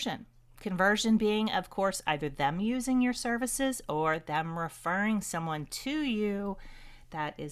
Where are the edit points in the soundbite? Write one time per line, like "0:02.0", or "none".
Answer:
none